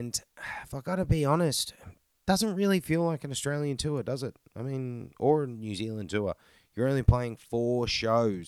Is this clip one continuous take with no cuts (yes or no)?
yes